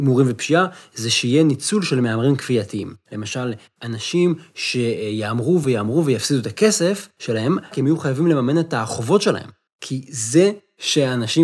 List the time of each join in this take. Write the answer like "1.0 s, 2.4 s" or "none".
5.6 s, 7.7 s, 9.7 s